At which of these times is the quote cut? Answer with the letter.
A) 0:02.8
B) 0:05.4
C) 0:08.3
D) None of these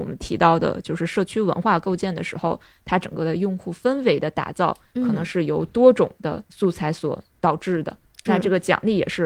C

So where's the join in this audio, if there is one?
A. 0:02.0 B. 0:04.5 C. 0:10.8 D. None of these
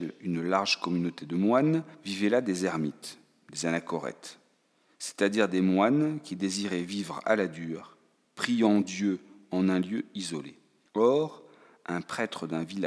C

